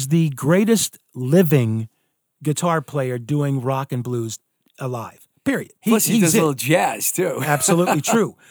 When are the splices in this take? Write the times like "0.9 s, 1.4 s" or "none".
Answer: 5.8 s